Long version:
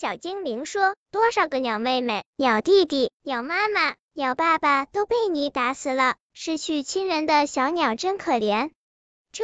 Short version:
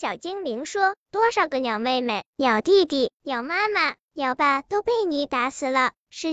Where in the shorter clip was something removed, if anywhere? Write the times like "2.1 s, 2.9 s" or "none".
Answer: 4.4 s